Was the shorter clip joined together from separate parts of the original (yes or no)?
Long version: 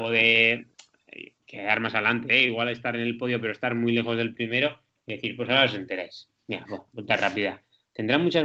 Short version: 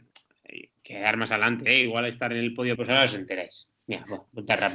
yes